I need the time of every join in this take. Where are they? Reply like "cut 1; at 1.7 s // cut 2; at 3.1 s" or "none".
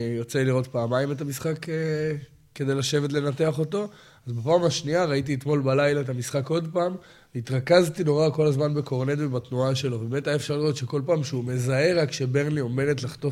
none